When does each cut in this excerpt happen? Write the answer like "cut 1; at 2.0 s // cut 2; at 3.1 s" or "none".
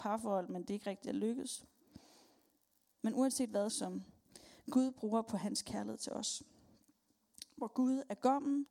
cut 1; at 3.7 s